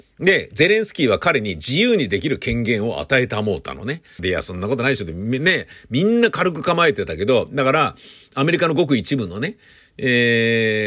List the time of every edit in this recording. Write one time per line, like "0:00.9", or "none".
0:04.2